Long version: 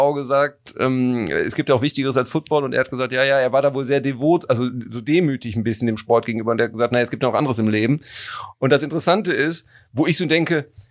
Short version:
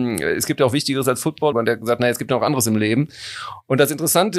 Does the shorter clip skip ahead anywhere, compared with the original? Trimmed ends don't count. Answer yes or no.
yes